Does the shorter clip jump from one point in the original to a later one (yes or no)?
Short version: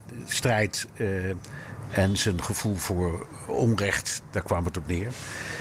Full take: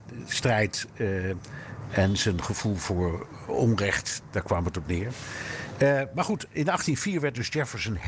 no